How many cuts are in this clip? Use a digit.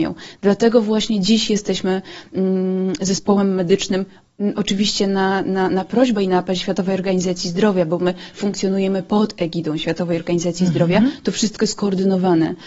0